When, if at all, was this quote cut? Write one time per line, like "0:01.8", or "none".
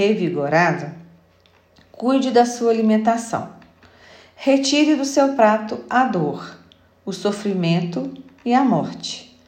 none